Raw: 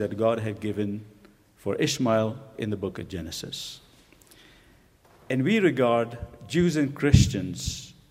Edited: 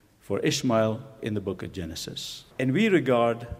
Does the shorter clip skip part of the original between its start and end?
yes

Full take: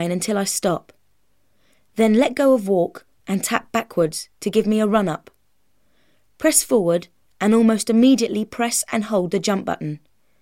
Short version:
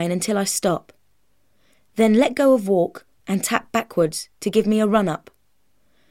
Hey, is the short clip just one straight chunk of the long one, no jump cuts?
yes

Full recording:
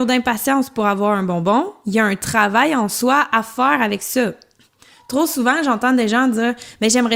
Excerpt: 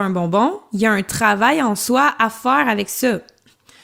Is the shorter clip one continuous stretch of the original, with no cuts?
yes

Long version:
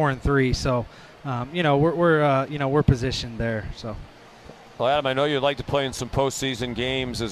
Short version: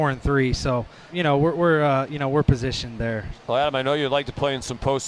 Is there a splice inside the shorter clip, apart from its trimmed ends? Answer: yes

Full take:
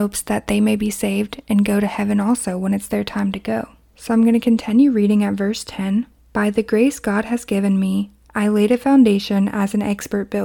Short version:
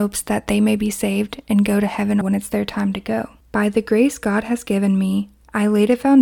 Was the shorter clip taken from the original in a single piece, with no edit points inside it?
no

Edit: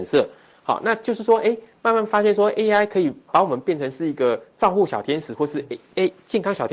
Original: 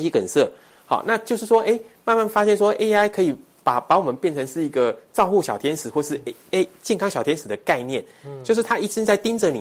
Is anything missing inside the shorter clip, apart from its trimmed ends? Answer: yes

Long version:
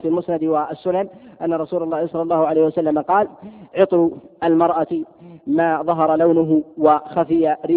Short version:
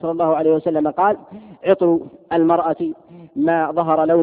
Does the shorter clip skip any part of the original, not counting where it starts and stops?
no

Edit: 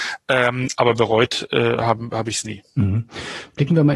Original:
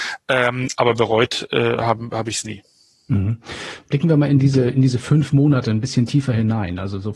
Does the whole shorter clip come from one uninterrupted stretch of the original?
no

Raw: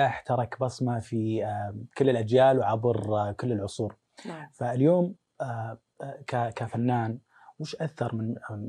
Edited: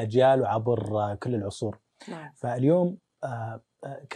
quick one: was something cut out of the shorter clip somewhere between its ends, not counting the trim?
no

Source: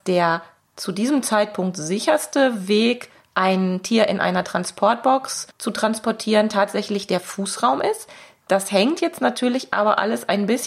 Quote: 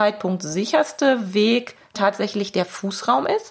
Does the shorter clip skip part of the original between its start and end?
yes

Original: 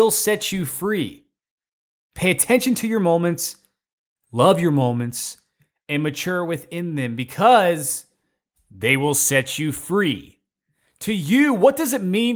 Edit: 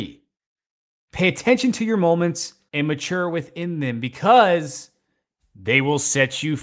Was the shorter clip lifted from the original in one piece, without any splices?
no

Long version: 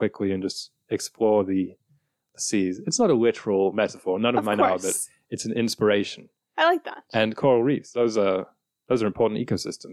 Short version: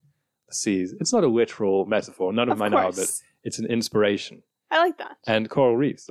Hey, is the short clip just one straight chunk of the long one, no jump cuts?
yes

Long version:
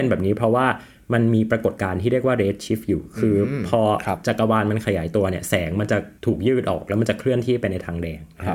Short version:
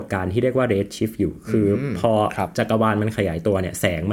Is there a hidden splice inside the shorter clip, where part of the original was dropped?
no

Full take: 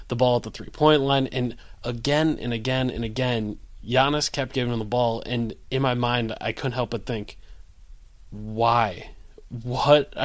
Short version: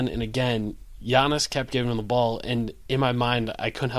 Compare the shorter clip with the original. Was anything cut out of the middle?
no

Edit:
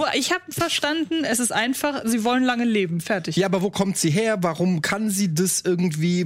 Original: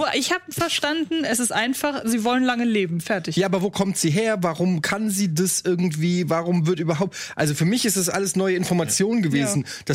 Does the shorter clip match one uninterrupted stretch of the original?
yes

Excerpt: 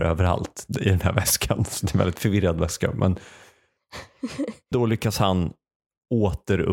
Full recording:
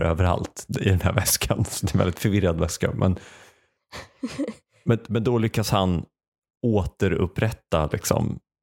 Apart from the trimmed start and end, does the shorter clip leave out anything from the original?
yes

